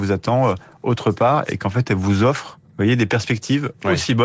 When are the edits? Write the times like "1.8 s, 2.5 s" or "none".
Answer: 2.7 s